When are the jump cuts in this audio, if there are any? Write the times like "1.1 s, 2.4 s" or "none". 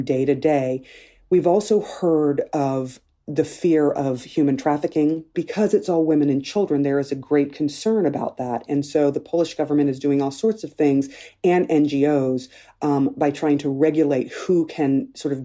none